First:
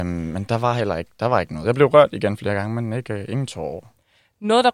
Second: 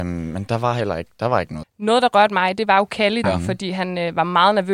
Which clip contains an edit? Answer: second; 2 cuts; at 1.6 s, 3.2 s

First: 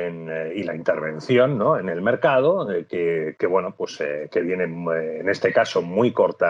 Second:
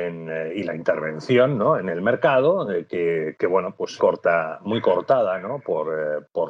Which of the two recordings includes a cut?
second; 1 cut; at 4.0 s

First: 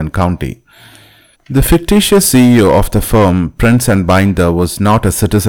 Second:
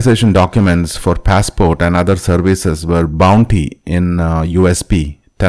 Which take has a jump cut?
first; 1 cut; at 1.3 s

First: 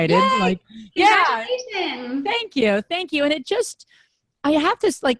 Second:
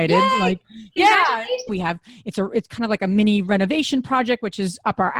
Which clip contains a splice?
second; 1 cut; at 1.7 s

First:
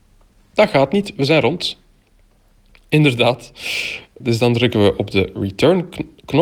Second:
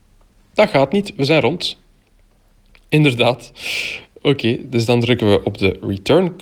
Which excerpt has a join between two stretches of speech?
first; 1 cut; at 4.2 s

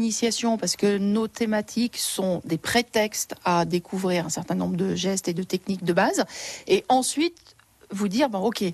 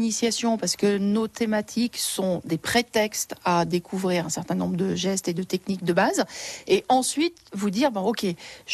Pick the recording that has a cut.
second; 1 cut; at 7.5 s

